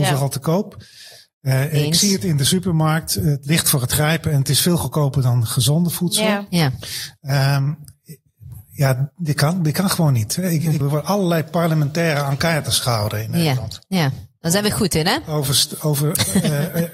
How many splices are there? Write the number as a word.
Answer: one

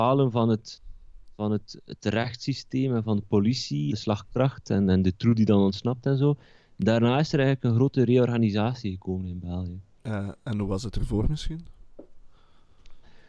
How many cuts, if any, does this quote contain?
one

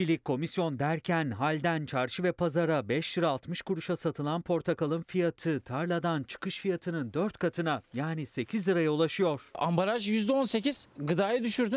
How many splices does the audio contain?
zero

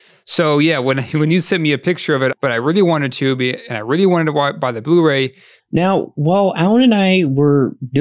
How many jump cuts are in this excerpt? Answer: two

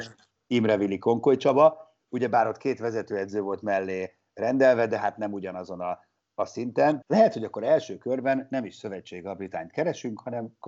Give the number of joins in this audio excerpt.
one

